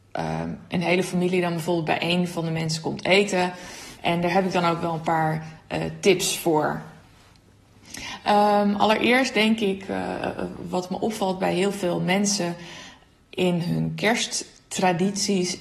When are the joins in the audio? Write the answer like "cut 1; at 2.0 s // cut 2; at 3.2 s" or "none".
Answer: cut 1; at 4.0 s